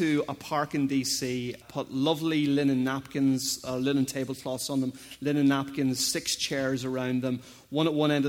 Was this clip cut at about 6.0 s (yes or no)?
no